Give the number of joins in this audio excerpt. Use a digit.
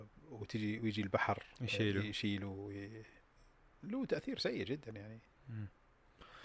0